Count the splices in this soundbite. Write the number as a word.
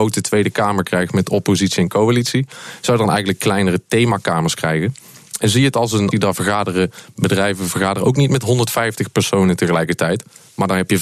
one